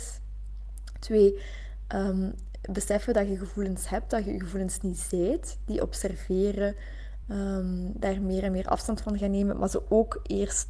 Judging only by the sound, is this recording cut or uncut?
uncut